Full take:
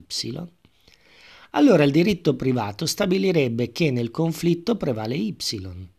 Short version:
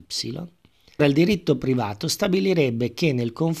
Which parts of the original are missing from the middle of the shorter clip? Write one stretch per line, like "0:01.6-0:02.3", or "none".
0:01.0-0:01.8